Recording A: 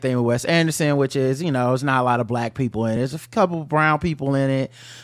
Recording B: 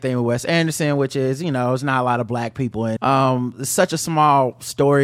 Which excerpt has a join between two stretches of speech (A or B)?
B